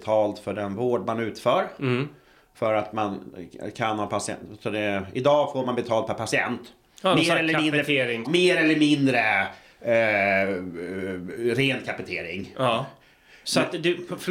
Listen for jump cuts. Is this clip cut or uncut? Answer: cut